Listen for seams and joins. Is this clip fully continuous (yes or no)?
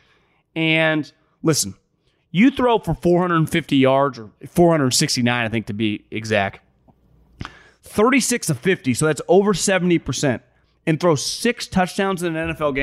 yes